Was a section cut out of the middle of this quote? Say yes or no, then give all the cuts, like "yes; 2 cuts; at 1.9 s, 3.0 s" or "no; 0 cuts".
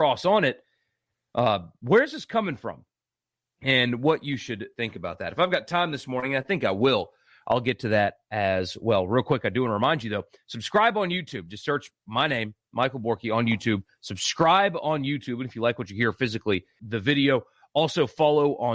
yes; 1 cut; at 16.8 s